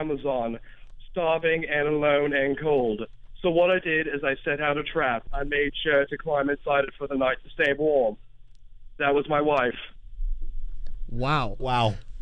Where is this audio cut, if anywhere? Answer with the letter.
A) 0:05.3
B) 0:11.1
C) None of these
A